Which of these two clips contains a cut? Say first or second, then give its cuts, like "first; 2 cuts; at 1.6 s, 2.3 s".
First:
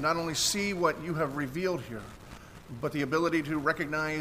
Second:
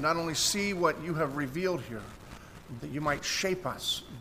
second; 1 cut; at 2.8 s